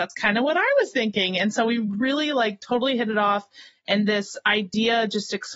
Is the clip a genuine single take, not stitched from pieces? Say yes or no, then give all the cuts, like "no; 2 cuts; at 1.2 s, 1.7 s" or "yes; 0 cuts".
yes; 0 cuts